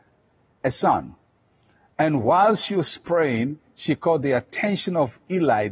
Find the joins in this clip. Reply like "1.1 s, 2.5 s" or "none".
none

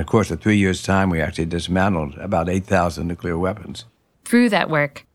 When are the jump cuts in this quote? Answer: 4.1 s

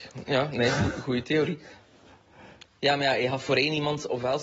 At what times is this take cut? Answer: 2.8 s

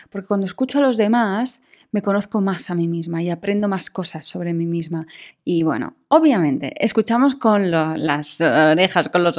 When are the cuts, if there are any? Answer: 5.3 s

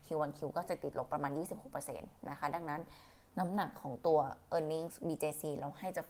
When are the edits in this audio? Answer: 3.3 s

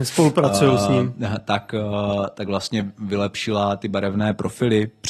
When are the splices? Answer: none

